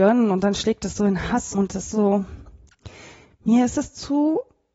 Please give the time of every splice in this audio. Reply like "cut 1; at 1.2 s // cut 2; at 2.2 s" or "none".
cut 1; at 1.5 s